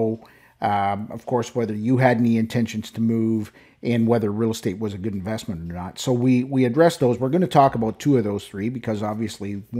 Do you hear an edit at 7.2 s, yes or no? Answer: no